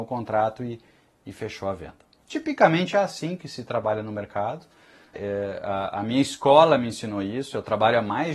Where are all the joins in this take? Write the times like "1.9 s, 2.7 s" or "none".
5.1 s